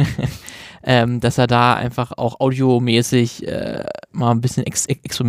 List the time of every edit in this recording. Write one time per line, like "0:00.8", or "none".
none